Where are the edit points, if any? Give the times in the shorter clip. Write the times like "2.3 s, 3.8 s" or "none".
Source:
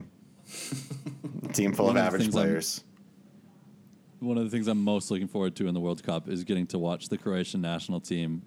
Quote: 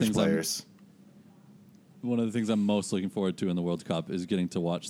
none